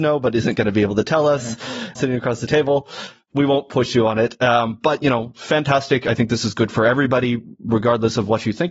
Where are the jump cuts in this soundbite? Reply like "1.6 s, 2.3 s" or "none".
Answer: 1.9 s